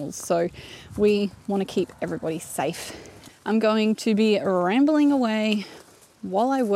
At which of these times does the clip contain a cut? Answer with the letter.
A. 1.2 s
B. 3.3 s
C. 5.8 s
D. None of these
B